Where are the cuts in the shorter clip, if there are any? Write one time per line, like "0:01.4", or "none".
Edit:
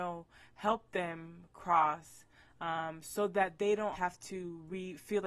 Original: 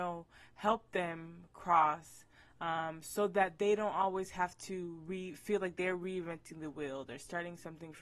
0:03.9